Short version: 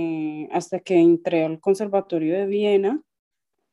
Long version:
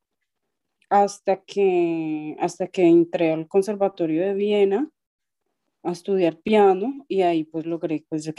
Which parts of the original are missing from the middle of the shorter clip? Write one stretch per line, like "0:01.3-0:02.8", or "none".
none